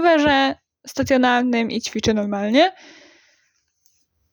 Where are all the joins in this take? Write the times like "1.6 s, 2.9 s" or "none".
none